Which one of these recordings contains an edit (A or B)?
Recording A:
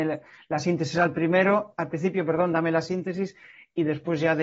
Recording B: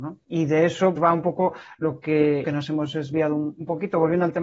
B